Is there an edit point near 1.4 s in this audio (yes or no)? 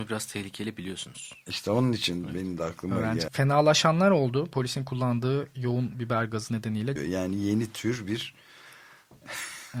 no